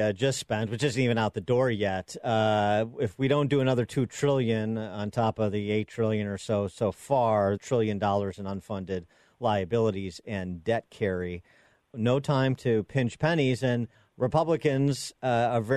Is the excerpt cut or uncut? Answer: cut